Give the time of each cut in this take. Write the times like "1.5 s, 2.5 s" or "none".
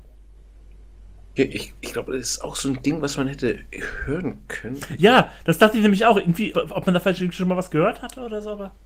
1.4 s, 6.5 s

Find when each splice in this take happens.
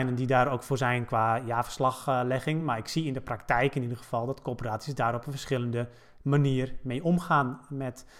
none

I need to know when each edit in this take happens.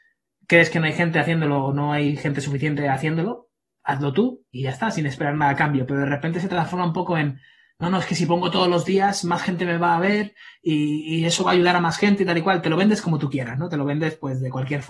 4.5 s

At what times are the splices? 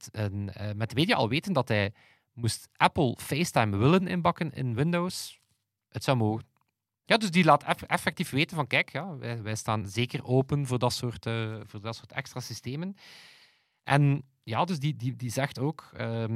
7.0 s

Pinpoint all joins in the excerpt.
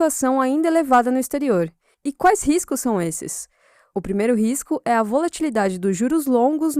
1.9 s

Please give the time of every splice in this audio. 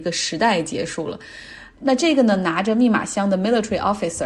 1.7 s

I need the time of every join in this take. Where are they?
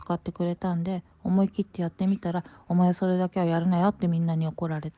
none

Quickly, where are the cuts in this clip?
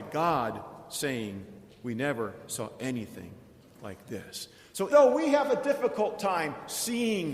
4.9 s

